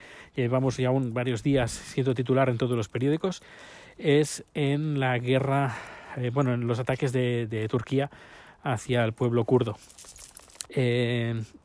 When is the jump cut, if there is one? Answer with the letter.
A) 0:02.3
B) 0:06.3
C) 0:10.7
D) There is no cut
C